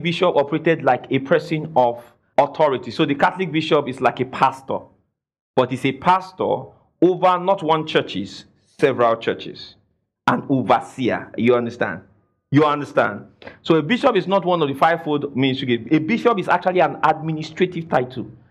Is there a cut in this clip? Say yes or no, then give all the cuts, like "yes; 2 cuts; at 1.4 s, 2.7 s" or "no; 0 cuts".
yes; 1 cut; at 2.3 s